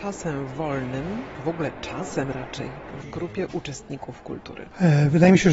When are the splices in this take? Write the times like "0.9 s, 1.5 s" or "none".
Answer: 3.0 s